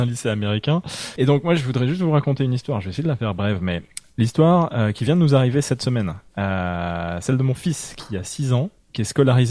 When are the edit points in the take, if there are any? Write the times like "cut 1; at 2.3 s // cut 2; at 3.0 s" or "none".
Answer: cut 1; at 1.2 s